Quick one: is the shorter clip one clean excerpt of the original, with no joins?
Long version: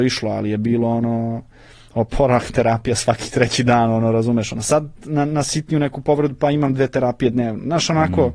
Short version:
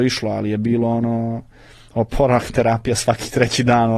yes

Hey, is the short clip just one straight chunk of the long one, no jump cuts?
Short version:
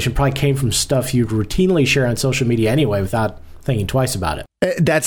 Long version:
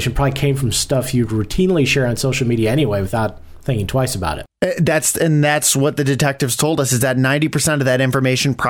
yes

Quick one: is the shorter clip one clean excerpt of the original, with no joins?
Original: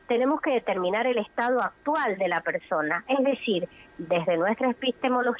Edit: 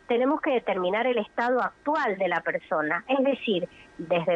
yes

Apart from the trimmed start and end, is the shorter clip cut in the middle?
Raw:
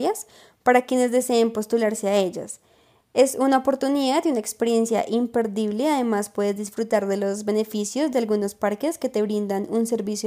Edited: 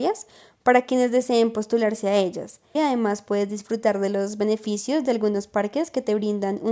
yes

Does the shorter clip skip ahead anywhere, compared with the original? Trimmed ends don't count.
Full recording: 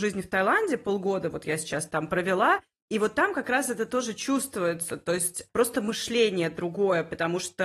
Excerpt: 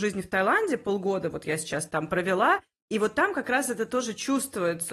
no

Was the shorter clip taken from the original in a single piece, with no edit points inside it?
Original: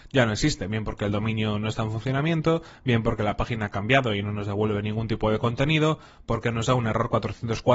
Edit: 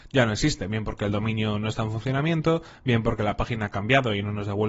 yes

